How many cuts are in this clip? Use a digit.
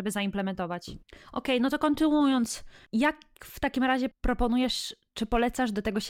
1